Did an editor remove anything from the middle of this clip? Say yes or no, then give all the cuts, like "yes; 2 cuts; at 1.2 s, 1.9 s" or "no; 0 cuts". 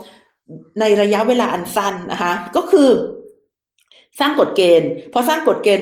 no; 0 cuts